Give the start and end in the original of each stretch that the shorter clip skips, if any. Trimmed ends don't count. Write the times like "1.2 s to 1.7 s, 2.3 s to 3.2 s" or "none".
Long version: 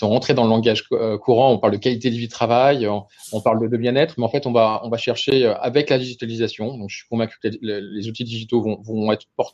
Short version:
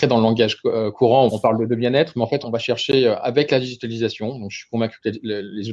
1.5 s to 3.3 s, 4.4 s to 4.8 s